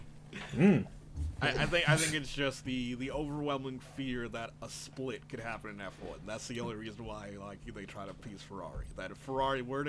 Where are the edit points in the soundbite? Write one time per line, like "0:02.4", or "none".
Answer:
0:01.4